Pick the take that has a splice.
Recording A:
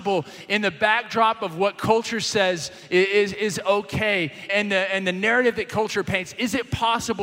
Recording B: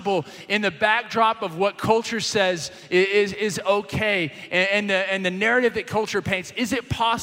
A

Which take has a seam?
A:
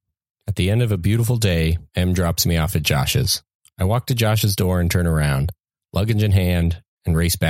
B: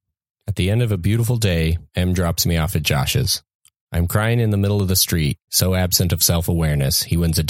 B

